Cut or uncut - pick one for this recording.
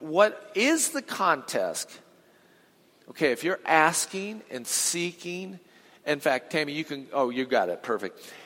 uncut